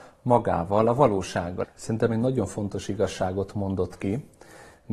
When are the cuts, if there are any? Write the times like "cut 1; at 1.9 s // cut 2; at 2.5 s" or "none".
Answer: cut 1; at 1.6 s